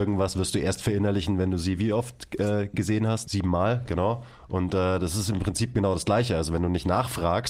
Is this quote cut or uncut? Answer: cut